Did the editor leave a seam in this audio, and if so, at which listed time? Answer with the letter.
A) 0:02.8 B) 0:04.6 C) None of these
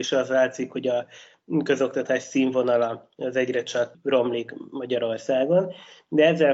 C